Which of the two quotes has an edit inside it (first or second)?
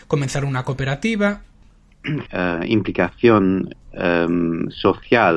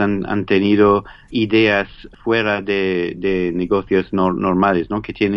first